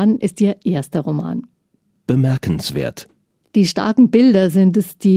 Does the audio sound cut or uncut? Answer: uncut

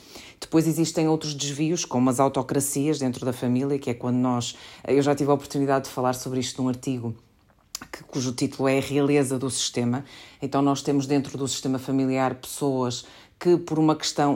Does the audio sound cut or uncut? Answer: uncut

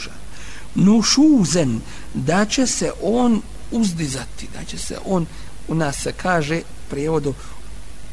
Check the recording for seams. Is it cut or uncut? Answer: uncut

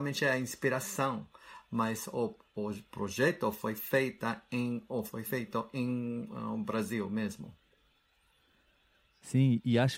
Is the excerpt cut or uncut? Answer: uncut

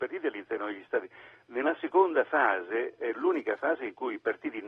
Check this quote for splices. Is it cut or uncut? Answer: uncut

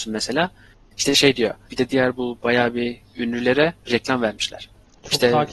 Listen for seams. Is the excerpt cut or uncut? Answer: cut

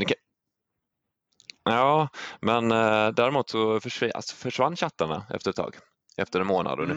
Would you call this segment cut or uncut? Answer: uncut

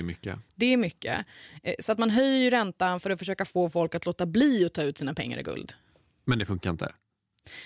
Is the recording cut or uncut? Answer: uncut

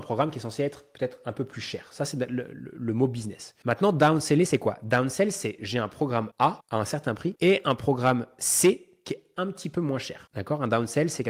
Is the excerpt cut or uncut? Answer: uncut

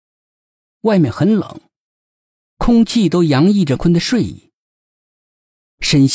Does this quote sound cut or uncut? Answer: cut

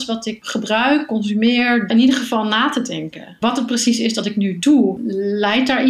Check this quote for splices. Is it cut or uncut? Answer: cut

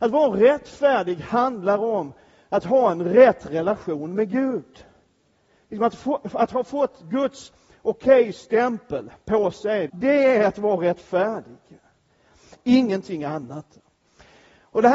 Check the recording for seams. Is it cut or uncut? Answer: cut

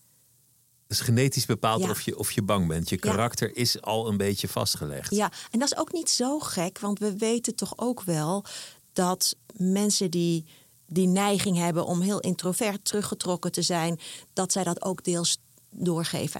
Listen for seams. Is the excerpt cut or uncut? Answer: uncut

